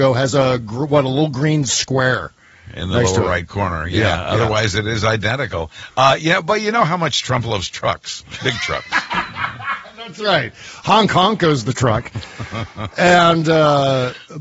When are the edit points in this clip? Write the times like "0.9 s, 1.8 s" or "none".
none